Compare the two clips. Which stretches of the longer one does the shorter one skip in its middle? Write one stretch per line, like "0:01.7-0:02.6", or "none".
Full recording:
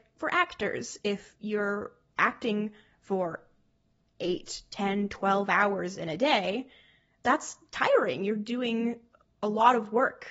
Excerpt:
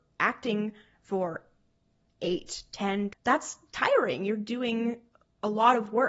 0:05.1-0:07.1